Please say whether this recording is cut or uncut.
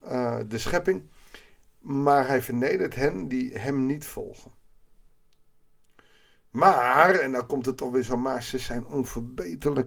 uncut